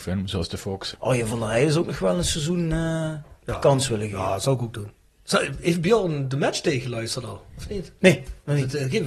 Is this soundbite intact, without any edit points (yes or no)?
no